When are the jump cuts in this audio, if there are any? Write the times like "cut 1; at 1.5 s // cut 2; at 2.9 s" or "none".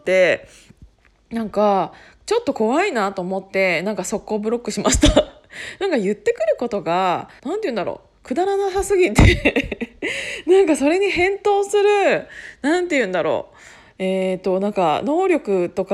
cut 1; at 7.4 s